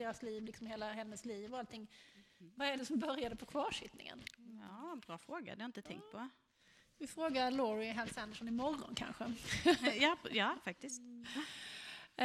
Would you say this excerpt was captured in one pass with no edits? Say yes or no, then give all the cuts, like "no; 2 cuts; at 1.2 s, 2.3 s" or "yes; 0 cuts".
yes; 0 cuts